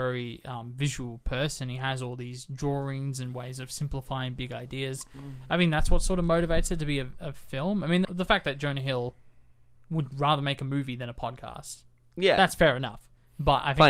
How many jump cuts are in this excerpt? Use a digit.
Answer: 1